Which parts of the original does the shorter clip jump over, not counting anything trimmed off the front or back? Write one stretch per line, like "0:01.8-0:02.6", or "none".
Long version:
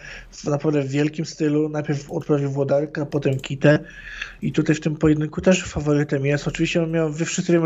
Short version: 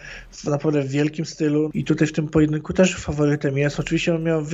0:01.7-0:04.4